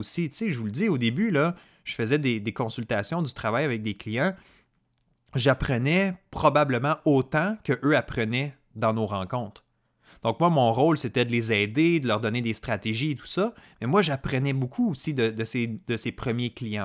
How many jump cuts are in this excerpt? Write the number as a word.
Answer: zero